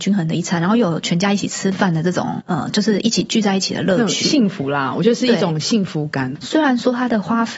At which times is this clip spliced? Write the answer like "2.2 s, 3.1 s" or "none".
none